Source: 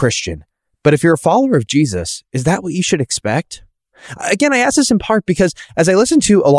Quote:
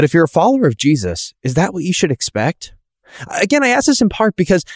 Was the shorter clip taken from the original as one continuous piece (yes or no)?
yes